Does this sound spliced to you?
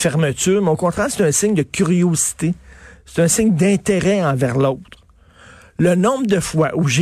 no; 0 cuts

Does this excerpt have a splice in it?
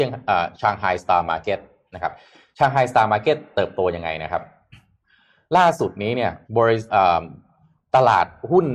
yes; 1 cut; at 6.4 s

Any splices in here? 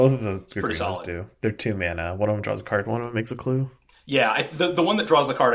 no; 0 cuts

